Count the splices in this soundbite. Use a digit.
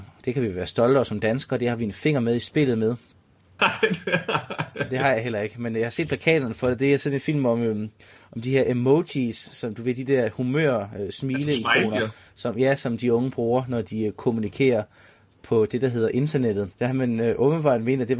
2